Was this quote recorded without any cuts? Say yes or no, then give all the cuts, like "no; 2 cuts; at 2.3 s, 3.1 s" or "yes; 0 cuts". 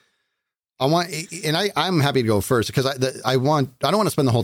yes; 0 cuts